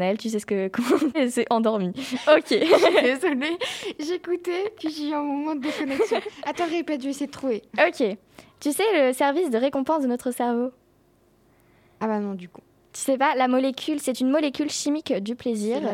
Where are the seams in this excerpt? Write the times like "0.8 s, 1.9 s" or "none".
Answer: 1.1 s